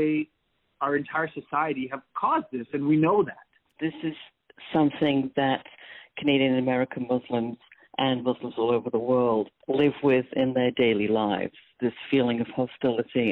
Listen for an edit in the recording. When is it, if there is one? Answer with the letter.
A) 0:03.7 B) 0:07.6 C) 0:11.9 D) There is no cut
A